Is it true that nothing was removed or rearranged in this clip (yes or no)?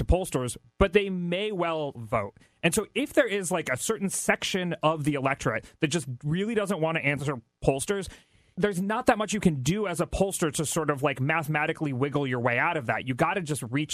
no